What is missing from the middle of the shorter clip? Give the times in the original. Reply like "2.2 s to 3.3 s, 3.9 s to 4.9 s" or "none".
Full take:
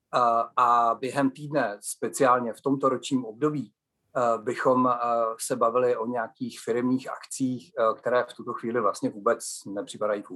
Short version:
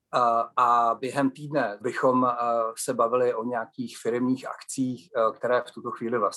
1.8 s to 4.4 s